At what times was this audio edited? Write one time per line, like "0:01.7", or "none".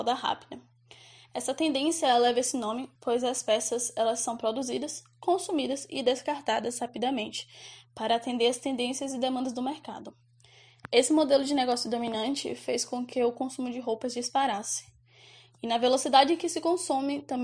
none